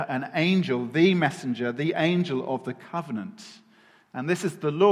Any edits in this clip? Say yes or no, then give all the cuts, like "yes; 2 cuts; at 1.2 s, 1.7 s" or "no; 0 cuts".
no; 0 cuts